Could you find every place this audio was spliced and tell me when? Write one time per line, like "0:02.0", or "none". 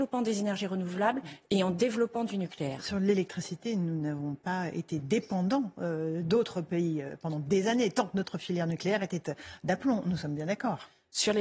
none